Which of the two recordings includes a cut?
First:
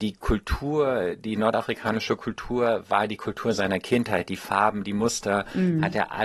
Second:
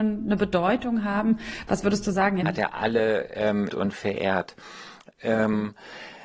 second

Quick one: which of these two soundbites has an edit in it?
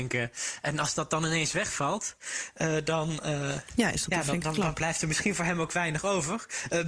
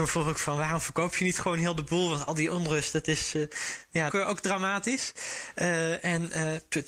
second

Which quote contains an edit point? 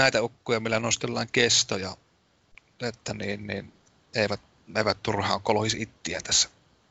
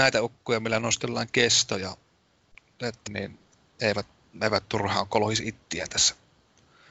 second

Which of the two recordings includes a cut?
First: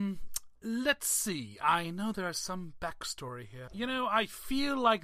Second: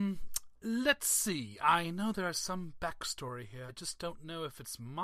first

